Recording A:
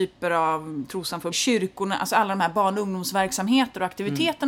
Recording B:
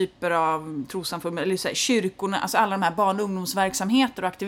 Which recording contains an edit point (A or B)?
A